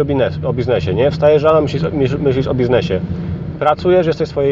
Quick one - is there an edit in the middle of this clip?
no; 0 cuts

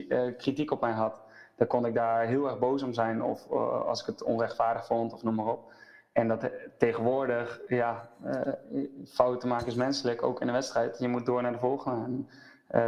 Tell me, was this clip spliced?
no; 0 cuts

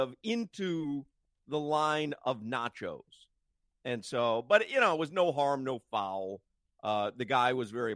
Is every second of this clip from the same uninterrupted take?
yes; 0 cuts

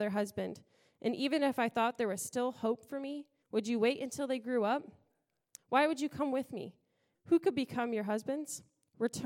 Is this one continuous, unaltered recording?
no; 3 cuts; at 3.4 s, 5.6 s, 7.1 s

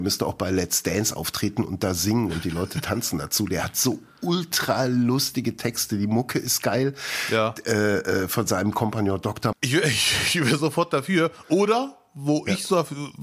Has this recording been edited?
yes; 1 cut; at 9.5 s

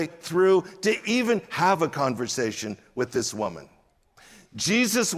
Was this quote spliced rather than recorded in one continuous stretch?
no; 0 cuts

